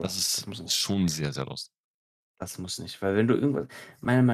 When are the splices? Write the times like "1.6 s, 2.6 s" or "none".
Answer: none